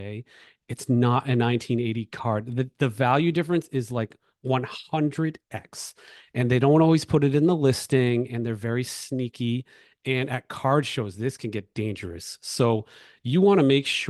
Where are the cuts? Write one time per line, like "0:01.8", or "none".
none